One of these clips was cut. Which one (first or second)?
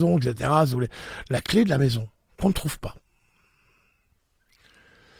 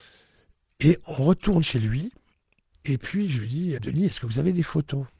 second